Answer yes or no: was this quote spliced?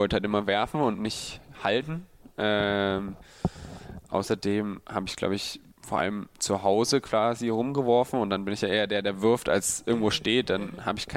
yes